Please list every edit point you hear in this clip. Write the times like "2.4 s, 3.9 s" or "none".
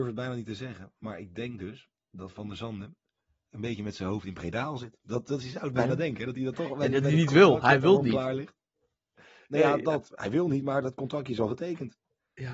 none